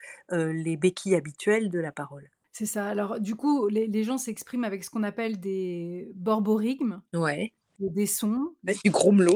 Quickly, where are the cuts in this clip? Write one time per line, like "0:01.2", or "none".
none